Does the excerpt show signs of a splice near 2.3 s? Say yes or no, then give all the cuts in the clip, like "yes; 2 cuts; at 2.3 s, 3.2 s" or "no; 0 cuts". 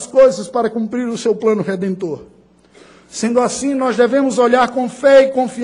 no; 0 cuts